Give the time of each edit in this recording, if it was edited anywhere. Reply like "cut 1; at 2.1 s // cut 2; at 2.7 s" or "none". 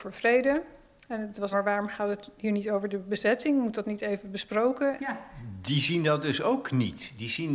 cut 1; at 1.5 s // cut 2; at 5.0 s